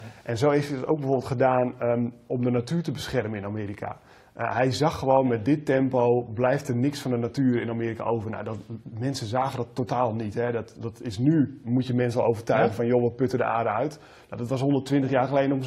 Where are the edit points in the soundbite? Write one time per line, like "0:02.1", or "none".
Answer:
none